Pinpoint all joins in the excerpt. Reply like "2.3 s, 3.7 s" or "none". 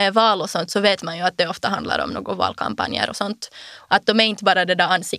3.9 s